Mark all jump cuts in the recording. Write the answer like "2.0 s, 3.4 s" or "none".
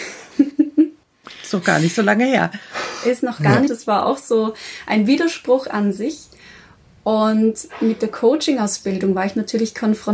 3.7 s